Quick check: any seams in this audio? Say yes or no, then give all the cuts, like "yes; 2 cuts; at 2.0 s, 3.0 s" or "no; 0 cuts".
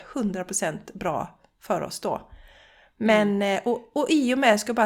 no; 0 cuts